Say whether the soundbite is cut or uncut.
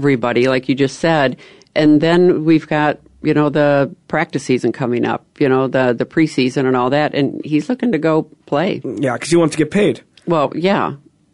uncut